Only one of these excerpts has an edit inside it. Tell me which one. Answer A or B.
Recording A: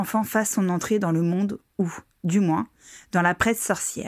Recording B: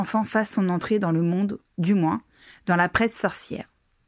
B